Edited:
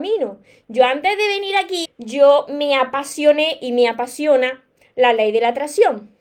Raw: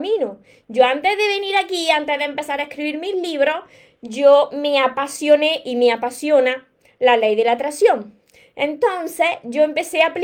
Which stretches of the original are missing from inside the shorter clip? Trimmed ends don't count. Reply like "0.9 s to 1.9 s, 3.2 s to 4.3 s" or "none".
1.8 s to 3.9 s